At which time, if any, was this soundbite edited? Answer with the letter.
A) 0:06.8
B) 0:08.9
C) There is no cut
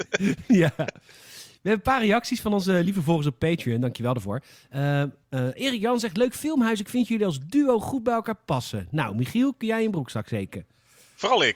C